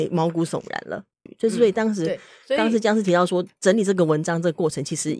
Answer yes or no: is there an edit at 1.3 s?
yes